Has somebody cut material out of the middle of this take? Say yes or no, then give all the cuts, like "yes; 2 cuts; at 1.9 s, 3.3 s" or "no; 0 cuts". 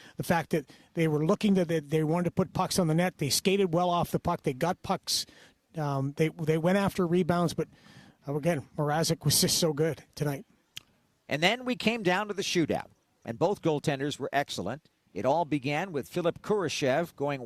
no; 0 cuts